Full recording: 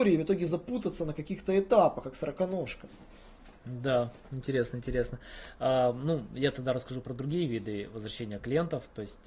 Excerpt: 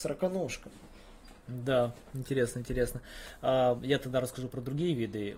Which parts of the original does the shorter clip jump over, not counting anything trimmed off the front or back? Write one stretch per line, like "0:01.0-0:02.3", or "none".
0:05.9-0:06.3